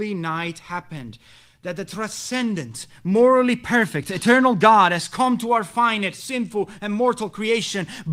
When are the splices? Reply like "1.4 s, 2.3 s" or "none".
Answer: none